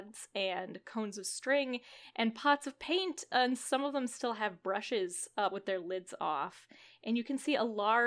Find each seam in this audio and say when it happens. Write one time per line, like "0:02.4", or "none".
0:05.5